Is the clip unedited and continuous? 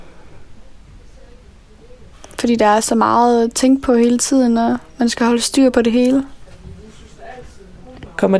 yes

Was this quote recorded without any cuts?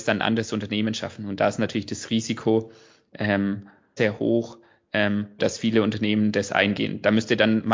no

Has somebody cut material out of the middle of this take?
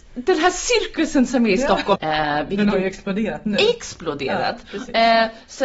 yes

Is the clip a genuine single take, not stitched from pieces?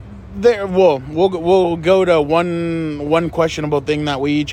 yes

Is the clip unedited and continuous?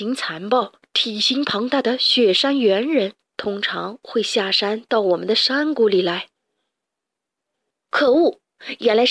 no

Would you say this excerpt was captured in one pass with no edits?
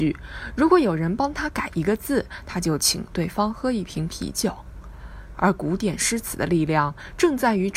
no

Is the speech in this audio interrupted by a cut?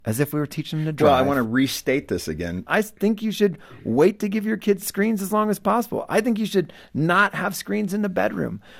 yes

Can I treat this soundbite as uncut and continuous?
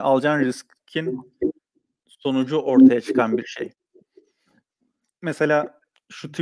yes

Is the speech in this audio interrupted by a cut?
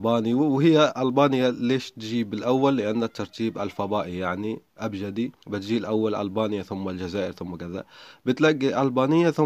yes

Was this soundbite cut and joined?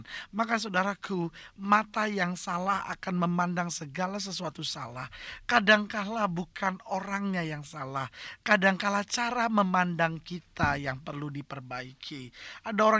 no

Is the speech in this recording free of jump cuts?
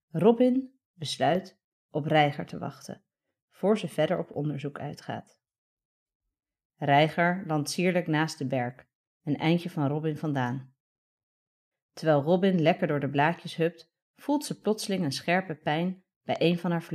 no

